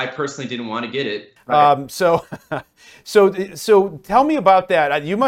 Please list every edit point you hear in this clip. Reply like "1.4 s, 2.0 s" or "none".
1.4 s